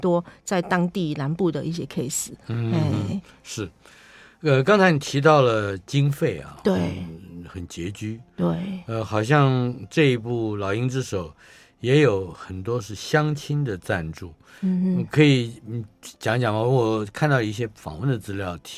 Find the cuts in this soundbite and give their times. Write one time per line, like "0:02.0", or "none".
none